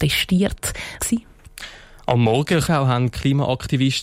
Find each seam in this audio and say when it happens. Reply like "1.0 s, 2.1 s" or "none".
1.0 s, 2.6 s